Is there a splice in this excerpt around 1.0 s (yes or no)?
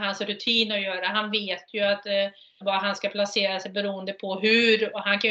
no